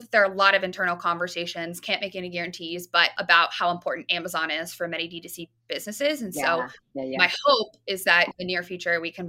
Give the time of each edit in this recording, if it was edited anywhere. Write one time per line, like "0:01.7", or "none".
none